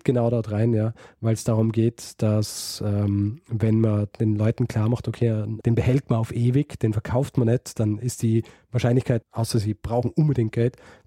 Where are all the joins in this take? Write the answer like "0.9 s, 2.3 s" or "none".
5.6 s, 8.0 s, 9.2 s